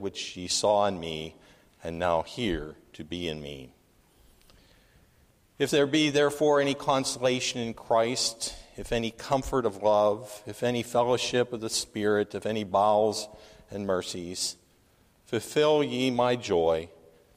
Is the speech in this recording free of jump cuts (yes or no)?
yes